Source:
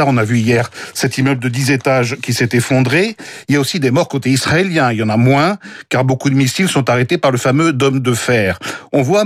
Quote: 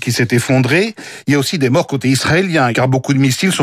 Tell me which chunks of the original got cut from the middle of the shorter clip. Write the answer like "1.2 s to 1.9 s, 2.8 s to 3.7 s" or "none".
4.9 s to 5.9 s